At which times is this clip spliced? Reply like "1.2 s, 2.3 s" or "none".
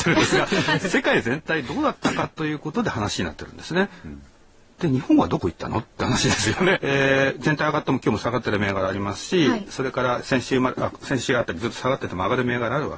6.7 s